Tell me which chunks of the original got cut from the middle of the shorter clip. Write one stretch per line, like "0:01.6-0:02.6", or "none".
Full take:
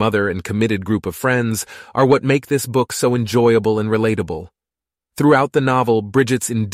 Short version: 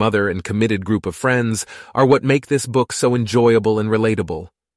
none